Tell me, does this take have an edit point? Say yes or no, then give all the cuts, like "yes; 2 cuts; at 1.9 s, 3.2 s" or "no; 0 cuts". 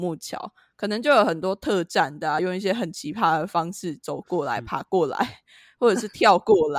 no; 0 cuts